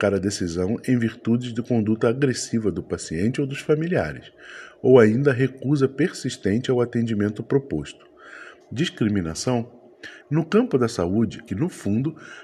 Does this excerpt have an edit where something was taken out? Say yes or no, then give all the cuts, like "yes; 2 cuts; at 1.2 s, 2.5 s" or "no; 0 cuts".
yes; 3 cuts; at 8.6 s, 10.2 s, 11.5 s